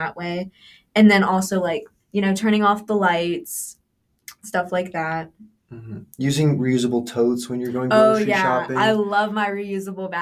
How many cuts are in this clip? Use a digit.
0